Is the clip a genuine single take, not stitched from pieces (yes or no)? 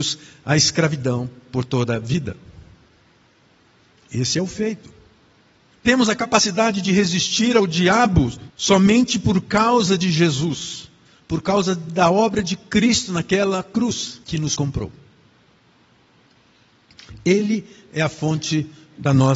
no